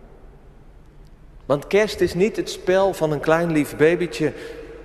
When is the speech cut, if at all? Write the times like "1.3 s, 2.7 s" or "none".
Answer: 1.4 s, 2.9 s

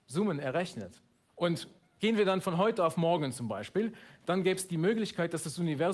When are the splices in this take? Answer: none

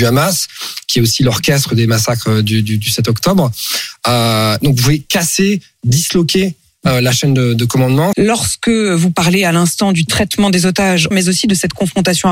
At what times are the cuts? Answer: 8.1 s, 11.1 s

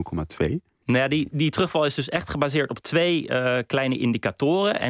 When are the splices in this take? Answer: none

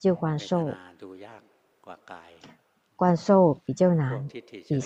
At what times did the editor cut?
none

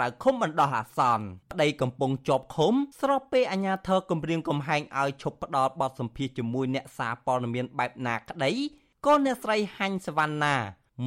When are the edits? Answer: 1.4 s, 2.9 s

